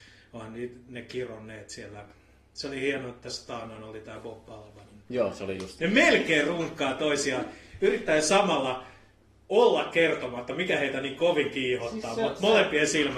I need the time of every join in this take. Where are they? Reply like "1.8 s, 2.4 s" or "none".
5.8 s